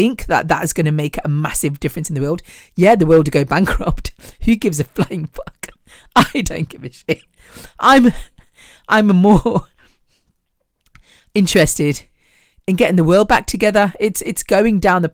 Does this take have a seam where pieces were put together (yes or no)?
no